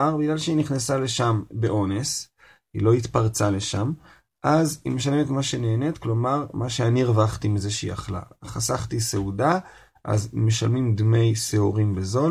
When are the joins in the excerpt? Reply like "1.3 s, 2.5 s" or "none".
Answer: none